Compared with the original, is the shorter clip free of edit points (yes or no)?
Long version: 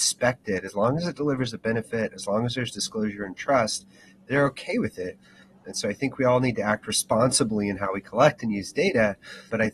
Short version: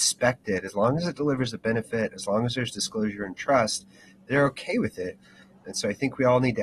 yes